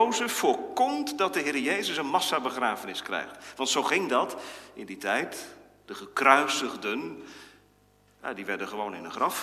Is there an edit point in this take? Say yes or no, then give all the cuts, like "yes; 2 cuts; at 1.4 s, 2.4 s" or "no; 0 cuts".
no; 0 cuts